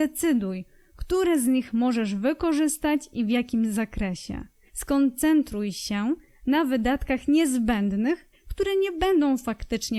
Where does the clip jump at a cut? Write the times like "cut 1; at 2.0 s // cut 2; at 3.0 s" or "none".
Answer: cut 1; at 4.7 s // cut 2; at 8.3 s

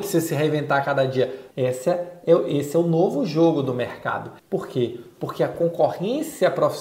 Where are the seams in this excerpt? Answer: cut 1; at 1.5 s // cut 2; at 4.4 s

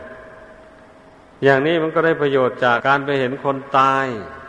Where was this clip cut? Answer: cut 1; at 2.8 s

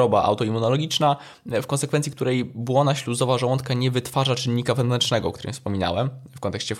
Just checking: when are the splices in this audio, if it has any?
none

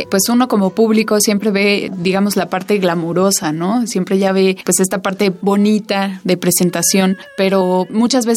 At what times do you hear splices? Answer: none

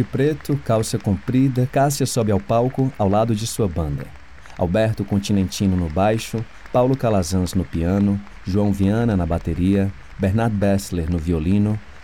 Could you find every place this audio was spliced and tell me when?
cut 1; at 1.7 s

